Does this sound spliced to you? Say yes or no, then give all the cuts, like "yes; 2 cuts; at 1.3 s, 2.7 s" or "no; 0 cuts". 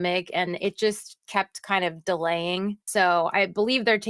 yes; 1 cut; at 2.8 s